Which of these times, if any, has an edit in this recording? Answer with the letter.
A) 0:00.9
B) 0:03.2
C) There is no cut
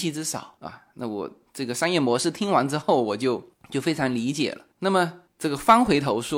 C